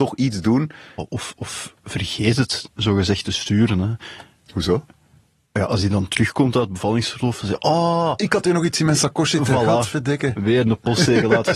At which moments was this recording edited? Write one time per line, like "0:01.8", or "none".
0:01.0